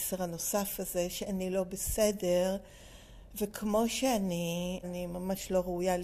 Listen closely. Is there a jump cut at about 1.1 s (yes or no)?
no